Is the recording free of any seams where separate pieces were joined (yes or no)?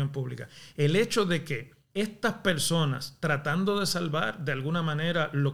no